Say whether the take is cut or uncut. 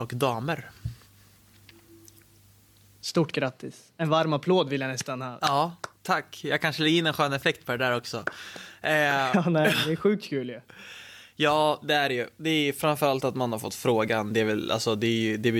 uncut